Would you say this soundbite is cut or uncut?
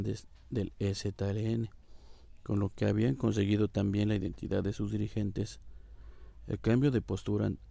uncut